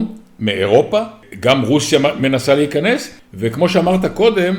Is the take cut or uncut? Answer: uncut